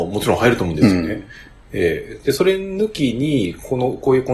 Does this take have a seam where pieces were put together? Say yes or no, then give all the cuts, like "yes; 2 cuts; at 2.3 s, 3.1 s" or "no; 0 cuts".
no; 0 cuts